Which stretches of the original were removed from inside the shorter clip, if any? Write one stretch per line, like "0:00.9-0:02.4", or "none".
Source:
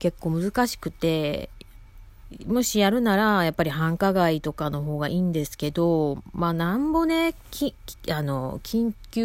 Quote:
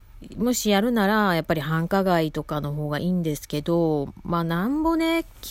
none